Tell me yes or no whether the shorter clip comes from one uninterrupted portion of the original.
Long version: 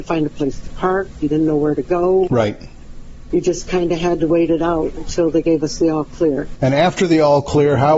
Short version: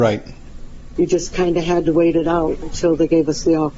yes